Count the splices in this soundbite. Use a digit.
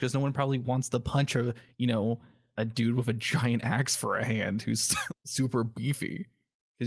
2